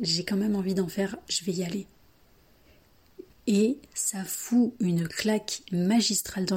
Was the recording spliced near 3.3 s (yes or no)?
yes